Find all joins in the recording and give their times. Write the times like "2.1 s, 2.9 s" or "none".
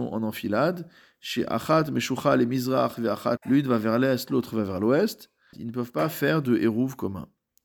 3.4 s, 5.5 s